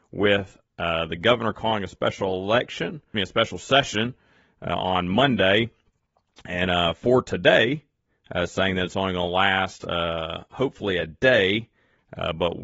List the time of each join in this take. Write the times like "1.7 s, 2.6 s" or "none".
3.1 s